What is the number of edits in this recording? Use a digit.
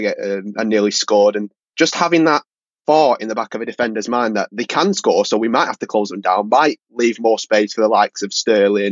0